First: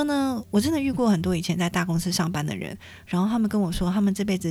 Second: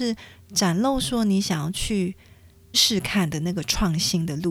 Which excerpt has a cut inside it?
second; 1 cut; at 2.7 s

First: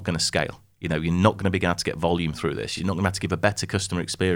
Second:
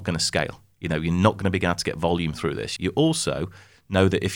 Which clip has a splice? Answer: second; 1 cut; at 2.8 s

